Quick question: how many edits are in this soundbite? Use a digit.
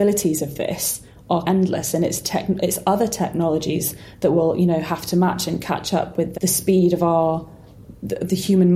2